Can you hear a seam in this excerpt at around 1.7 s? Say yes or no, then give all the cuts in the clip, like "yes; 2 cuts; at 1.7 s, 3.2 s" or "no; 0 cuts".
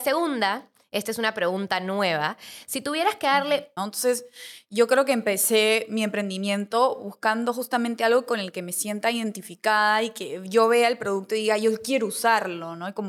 no; 1 cut; at 3.8 s